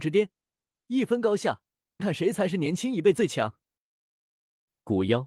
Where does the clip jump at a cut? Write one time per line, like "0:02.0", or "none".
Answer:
0:02.0